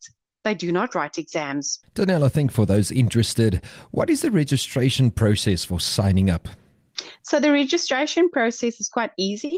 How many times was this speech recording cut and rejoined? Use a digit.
1